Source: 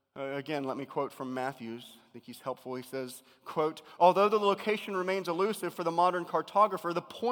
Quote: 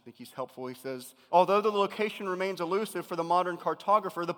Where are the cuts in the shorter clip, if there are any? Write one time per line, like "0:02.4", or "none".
0:01.3